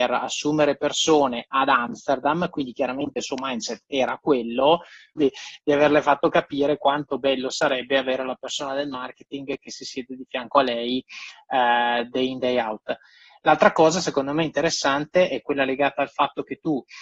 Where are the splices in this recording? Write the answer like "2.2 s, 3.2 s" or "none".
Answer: 5.2 s